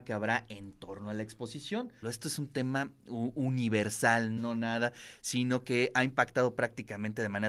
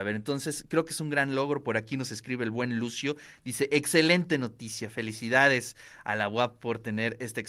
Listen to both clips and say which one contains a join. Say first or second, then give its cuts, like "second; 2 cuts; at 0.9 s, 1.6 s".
first; 2 cuts; at 2.0 s, 4.4 s